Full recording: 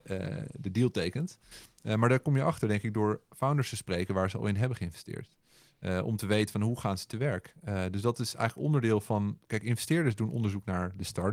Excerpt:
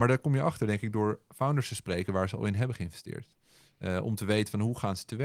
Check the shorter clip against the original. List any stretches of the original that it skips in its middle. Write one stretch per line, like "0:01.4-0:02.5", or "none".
none

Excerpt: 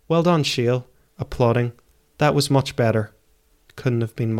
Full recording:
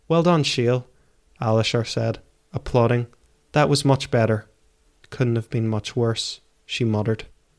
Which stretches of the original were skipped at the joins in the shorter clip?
0:01.1-0:02.4

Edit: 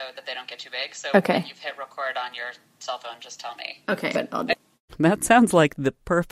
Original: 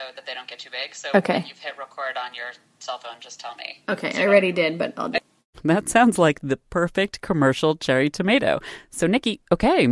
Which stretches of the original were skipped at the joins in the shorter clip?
0:04.1-0:04.8

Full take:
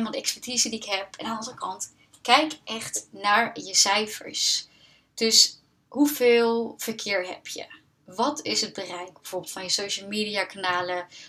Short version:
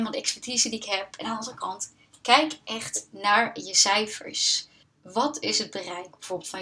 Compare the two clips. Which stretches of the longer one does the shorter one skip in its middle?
0:04.8-0:07.9

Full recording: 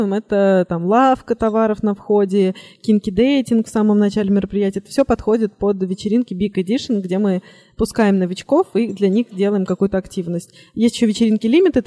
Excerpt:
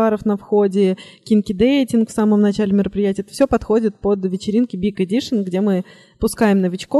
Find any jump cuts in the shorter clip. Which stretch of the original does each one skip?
none

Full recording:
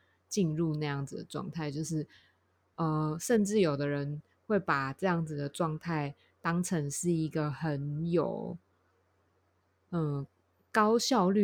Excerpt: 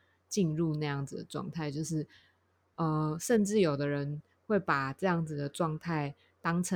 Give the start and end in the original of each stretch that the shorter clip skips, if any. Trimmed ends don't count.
none

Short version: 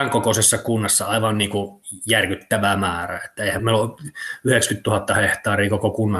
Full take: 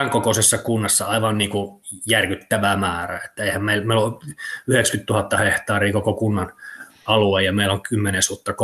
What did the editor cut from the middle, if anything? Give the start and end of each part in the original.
0:03.6-0:03.8

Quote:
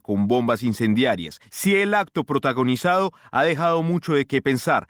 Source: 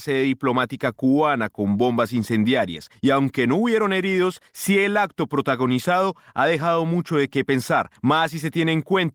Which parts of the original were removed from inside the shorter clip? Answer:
0:03.0-0:04.5

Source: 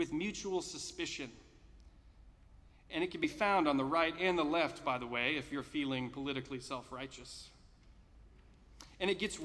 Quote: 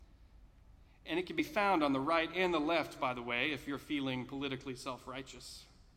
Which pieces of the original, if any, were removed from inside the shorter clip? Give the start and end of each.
none

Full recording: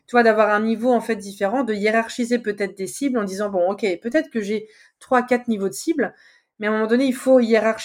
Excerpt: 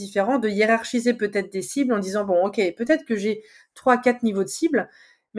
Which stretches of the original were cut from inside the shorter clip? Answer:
none

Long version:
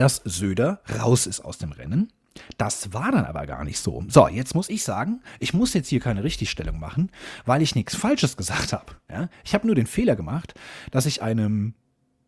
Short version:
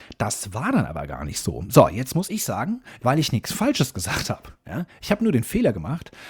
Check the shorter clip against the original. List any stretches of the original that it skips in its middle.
0:05.4-0:07.4

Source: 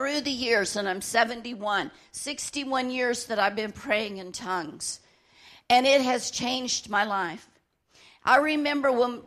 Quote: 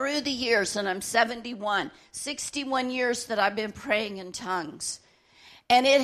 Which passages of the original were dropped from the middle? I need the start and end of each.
none

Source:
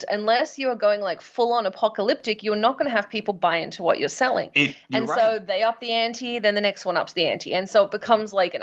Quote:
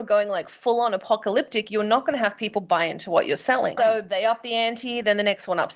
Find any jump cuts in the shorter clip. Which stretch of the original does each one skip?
0:04.5-0:05.1

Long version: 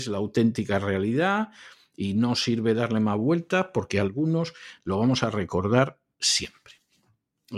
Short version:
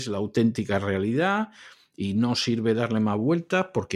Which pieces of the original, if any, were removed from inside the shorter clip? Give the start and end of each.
none

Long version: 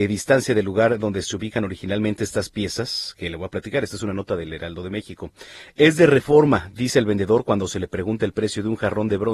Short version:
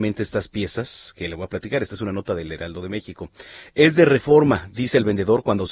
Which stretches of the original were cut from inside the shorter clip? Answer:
none

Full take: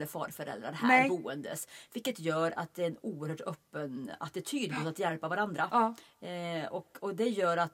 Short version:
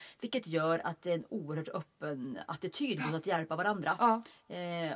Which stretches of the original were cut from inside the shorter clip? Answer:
none

